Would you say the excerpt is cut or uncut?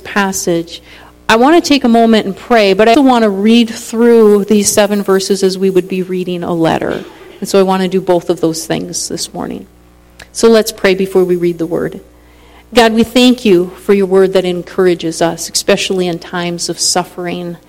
cut